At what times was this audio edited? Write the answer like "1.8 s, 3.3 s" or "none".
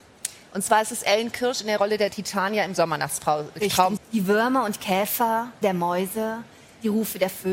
4.0 s, 5.6 s